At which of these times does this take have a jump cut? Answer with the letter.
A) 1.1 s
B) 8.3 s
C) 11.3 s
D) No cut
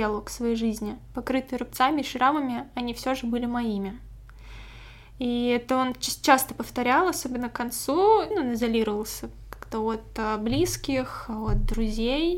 B